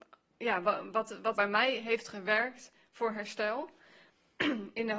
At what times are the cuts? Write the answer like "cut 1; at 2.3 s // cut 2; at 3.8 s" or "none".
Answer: cut 1; at 1.3 s